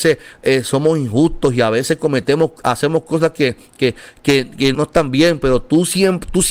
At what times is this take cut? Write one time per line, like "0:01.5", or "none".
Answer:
0:04.7